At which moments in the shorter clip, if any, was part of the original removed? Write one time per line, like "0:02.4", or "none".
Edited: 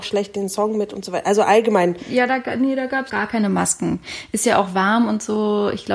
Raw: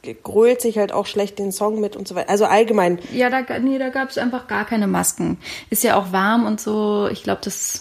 0:03.1